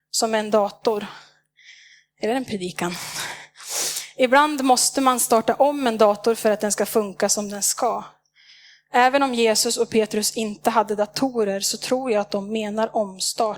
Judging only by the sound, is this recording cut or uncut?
uncut